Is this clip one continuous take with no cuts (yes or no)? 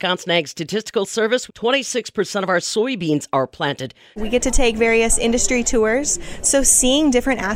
no